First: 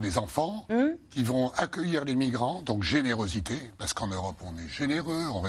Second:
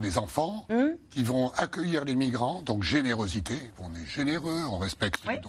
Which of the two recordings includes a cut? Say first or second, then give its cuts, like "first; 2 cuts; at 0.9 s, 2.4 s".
second; 1 cut; at 3.7 s